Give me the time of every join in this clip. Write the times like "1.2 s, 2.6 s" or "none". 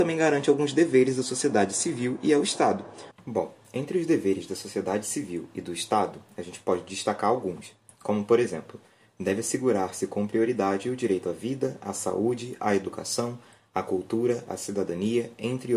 3.1 s, 14.5 s